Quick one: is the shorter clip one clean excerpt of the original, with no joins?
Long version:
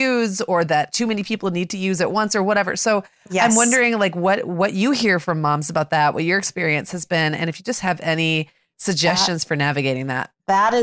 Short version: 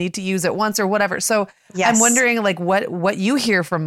yes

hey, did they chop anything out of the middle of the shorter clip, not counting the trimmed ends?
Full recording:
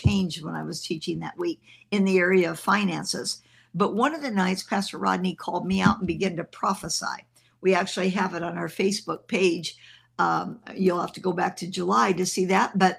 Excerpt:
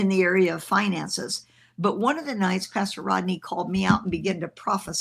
no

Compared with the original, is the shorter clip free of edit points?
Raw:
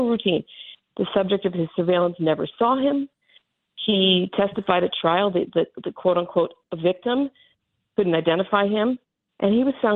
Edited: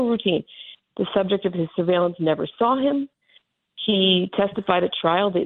yes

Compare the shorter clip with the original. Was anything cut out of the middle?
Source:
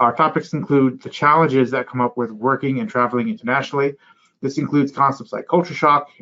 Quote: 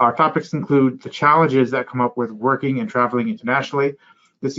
no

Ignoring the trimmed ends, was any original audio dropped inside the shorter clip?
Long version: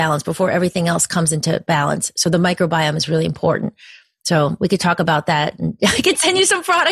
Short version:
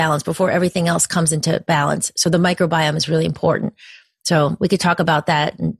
no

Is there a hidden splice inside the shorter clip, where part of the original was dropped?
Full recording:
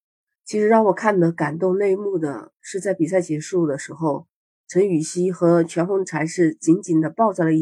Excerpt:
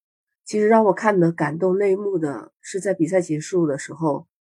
no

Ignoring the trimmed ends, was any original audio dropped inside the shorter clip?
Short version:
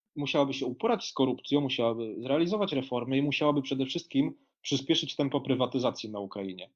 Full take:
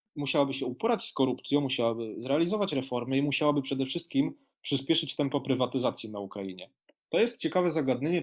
no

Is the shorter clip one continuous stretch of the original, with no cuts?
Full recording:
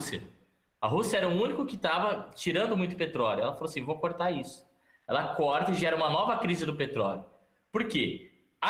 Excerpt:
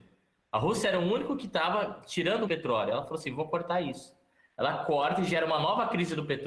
no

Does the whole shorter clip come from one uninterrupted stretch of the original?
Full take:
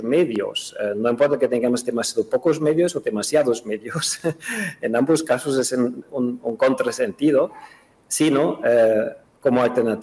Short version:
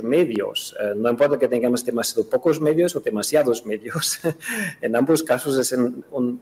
yes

